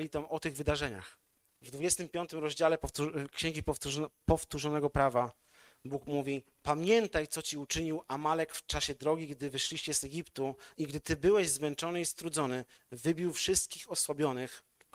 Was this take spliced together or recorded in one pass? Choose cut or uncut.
cut